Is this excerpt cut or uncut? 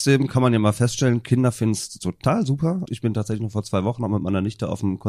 cut